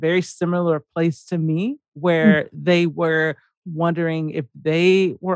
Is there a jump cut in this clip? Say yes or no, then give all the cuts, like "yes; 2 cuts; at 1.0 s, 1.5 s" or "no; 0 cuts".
no; 0 cuts